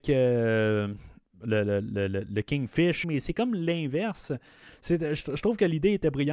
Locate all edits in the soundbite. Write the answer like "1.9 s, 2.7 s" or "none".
3.0 s